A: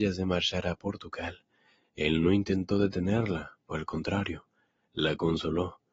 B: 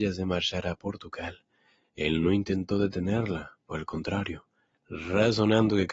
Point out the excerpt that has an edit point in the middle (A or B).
B